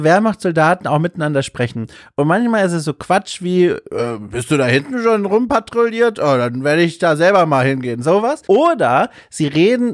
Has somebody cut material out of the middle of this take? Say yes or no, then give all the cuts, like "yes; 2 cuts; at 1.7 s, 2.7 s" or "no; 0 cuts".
yes; 1 cut; at 8.4 s